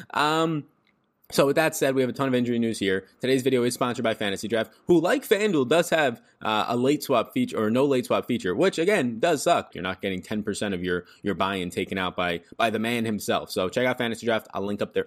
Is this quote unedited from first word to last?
no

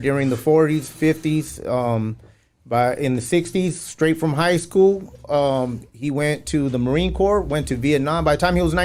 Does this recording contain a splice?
no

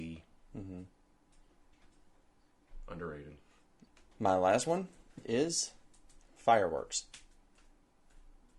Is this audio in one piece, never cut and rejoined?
no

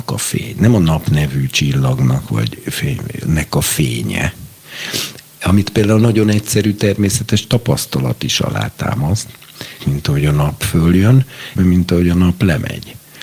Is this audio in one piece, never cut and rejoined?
no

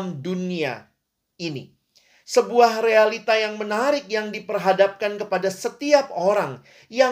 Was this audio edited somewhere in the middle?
no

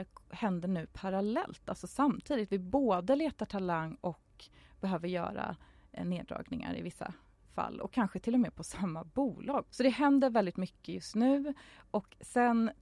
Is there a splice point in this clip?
yes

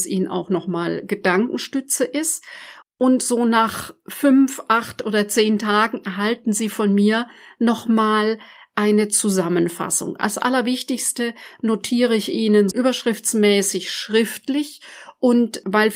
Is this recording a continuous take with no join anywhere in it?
no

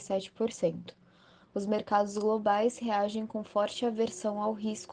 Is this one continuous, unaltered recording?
no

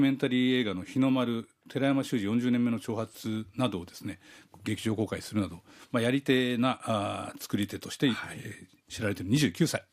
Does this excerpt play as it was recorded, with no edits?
yes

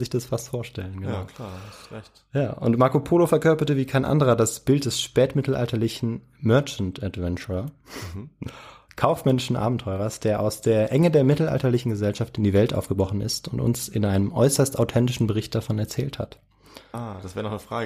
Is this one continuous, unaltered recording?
no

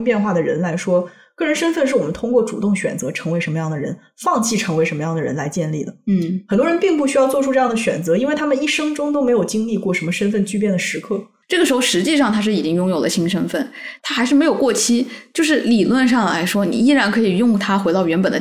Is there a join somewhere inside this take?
yes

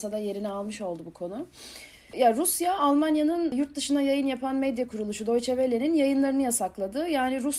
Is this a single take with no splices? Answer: yes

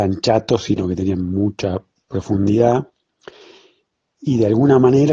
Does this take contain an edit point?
no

